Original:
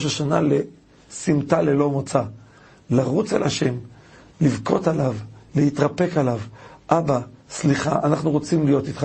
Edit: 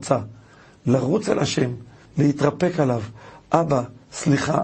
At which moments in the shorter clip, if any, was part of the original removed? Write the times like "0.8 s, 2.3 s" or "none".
2.0 s